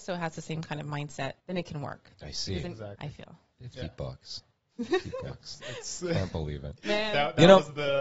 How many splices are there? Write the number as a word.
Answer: three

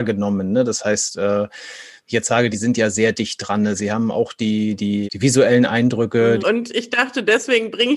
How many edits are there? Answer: three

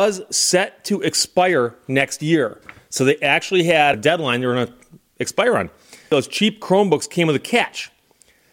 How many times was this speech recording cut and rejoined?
one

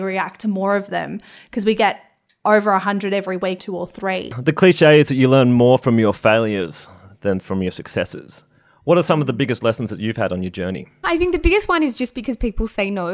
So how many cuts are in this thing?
one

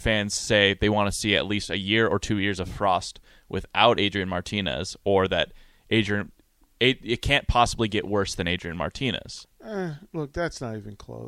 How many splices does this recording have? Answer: one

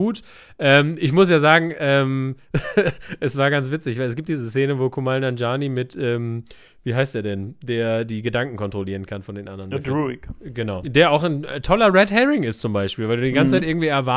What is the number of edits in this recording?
one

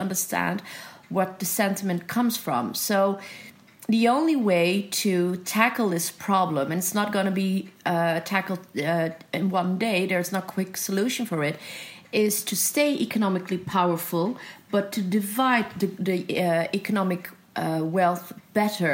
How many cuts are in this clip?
zero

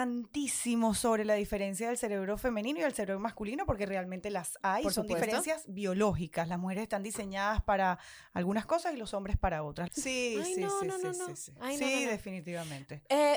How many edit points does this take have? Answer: one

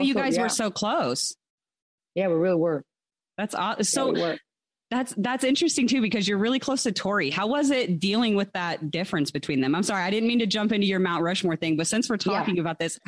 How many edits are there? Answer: zero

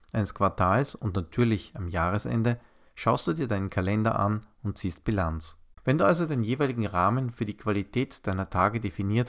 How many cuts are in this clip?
one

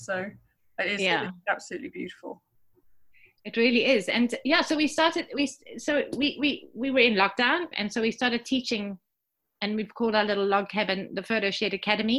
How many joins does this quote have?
one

